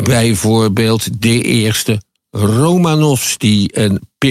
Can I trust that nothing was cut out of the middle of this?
yes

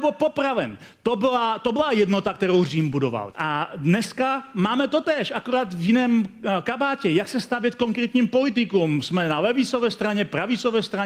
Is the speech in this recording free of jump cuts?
no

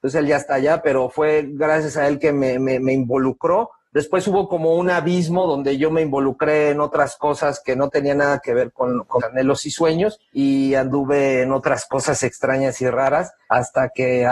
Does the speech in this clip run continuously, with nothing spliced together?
no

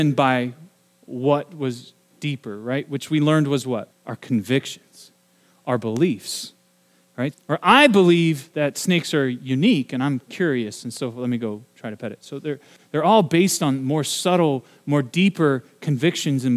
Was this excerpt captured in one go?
no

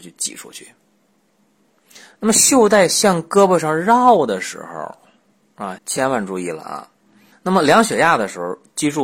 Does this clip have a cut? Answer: yes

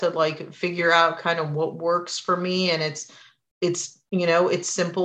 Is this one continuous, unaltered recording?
yes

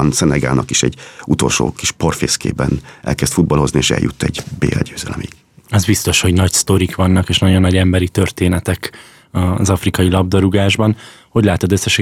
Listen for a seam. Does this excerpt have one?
no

